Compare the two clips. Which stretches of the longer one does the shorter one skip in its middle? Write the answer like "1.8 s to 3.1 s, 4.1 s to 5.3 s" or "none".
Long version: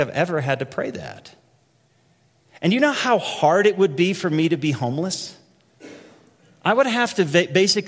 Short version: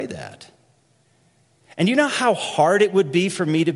none